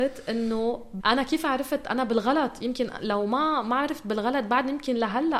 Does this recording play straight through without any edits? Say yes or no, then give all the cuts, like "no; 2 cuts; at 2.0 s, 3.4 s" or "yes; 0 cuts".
no; 1 cut; at 1.0 s